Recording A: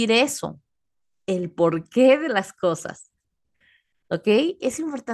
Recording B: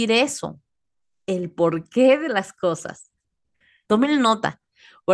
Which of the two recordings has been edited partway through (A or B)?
B